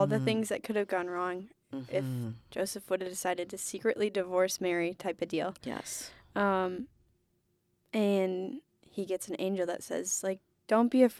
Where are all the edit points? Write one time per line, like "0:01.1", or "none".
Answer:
none